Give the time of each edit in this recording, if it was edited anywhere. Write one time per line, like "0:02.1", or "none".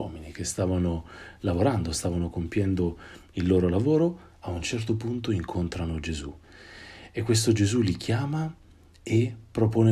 none